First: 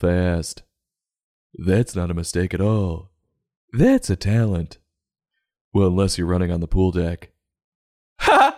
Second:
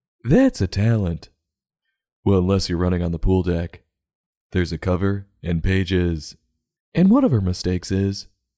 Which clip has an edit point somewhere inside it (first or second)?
second